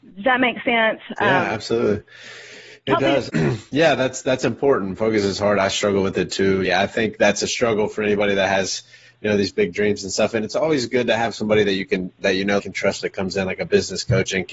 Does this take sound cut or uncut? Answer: cut